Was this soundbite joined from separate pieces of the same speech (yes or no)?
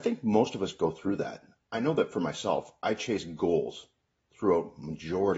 no